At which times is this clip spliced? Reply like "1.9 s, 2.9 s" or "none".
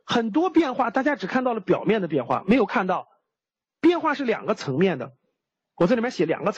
none